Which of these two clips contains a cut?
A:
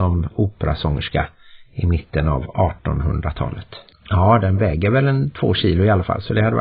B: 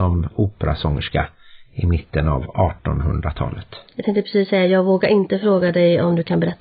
A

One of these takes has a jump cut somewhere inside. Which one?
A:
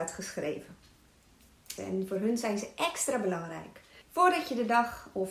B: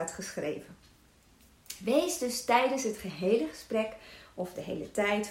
A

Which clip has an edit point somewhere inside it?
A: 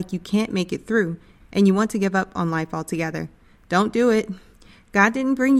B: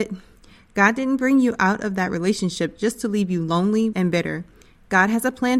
B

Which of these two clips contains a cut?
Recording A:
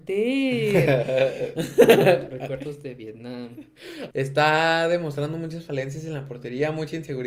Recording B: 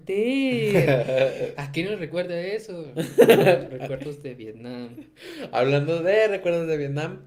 A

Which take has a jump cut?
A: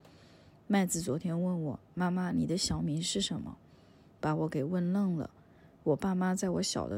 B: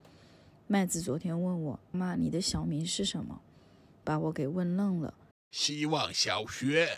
B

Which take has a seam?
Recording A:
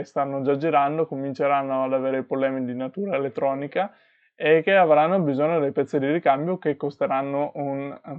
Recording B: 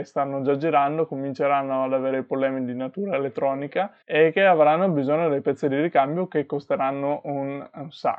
B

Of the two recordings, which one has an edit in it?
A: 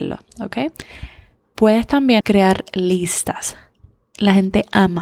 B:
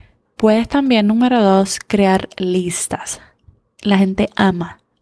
A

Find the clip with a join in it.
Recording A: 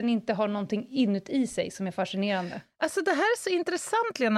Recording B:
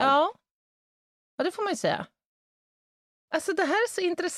B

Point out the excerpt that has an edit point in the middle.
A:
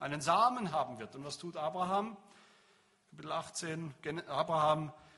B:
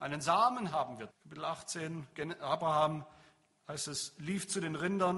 B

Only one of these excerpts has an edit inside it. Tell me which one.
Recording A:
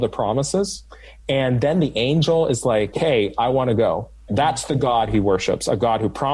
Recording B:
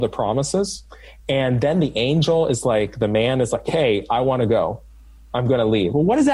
A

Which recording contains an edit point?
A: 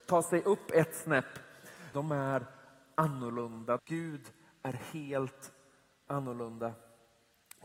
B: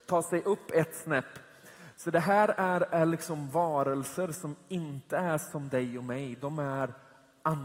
A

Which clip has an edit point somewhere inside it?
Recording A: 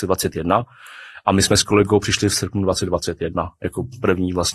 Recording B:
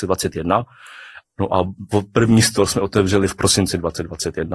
B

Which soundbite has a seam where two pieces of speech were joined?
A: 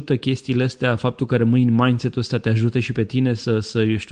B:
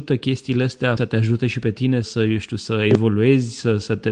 B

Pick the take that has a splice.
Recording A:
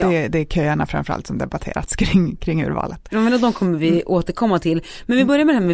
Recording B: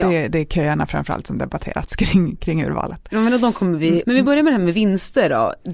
B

